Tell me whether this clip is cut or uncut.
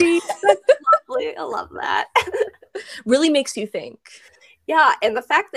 uncut